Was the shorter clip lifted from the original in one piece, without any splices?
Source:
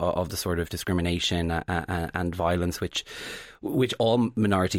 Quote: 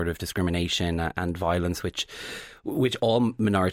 no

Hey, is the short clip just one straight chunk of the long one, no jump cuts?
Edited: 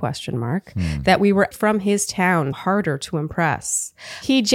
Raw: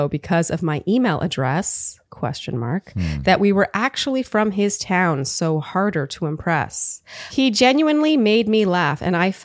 no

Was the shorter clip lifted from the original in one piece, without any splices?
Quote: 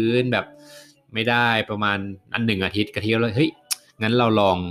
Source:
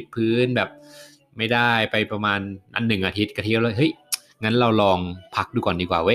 no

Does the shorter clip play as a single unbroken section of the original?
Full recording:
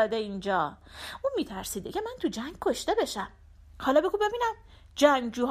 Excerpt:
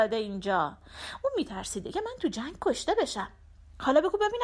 yes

